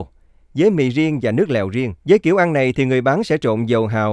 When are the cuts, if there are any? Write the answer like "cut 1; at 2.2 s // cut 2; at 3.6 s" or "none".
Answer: cut 1; at 2.0 s